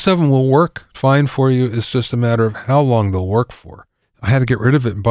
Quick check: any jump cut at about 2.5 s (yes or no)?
no